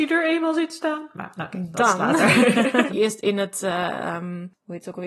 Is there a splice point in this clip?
yes; 1 cut; at 2.9 s

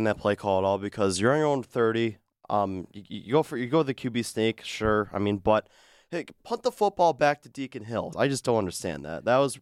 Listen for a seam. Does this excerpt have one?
yes; 2 cuts; at 6.4 s, 8.1 s

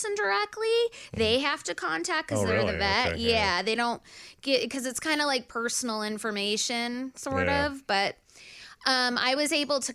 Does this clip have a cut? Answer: no; 0 cuts

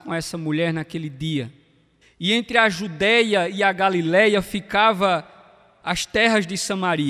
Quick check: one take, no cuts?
no; 1 cut; at 2.0 s

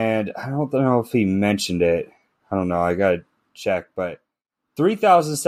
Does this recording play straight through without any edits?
yes; 0 cuts

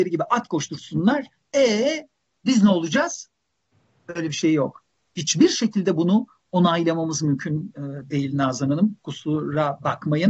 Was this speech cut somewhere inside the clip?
no; 0 cuts

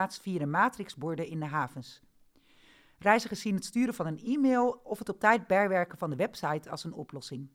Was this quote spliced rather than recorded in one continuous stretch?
no; 0 cuts

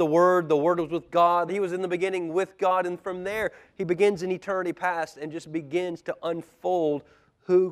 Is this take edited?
yes; 1 cut; at 1.5 s

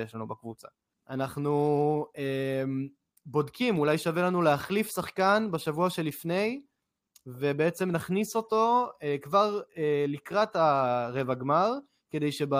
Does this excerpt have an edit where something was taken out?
no; 0 cuts

